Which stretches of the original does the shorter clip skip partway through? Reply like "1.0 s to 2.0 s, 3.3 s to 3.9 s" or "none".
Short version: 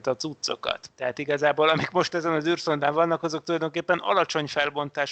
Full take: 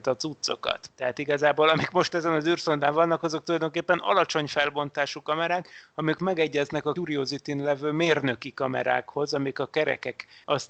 none